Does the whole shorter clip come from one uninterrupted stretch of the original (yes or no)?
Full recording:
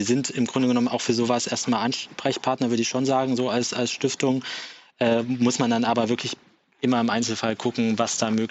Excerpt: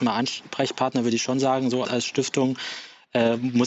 no